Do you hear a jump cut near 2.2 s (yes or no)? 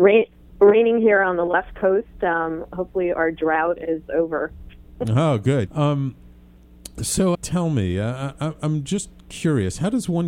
no